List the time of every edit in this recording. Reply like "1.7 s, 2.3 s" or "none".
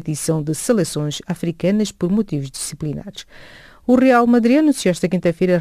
none